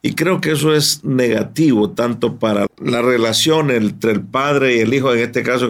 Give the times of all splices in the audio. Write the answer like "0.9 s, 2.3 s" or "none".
2.7 s